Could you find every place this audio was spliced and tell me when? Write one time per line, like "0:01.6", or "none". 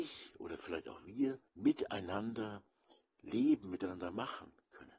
0:01.5